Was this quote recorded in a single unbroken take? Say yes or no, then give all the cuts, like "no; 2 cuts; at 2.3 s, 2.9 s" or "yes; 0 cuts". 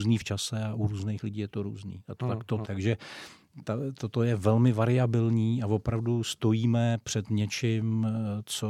no; 1 cut; at 2.6 s